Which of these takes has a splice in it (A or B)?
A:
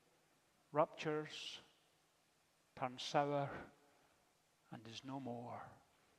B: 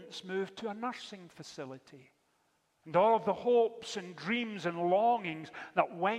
B